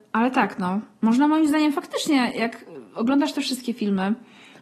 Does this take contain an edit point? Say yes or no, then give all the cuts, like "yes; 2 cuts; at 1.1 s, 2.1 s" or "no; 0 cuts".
no; 0 cuts